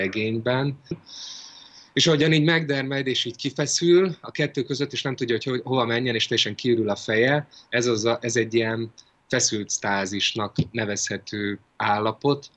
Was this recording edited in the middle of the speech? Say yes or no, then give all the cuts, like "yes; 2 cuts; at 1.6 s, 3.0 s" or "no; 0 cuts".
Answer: yes; 1 cut; at 0.9 s